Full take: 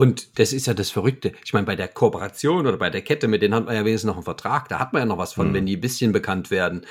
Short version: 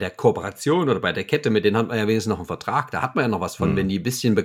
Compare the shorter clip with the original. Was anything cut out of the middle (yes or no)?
no